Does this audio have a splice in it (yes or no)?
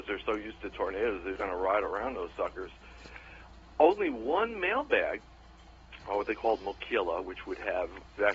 yes